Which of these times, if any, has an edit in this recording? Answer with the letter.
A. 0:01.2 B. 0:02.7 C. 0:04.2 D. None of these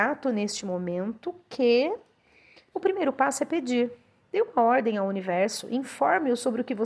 B